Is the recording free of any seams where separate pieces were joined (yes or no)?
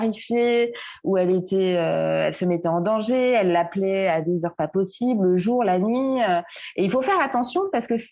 yes